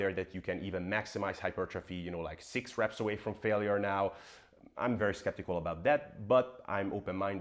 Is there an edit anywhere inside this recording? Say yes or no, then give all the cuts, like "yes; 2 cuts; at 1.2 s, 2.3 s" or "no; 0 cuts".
yes; 1 cut; at 5.0 s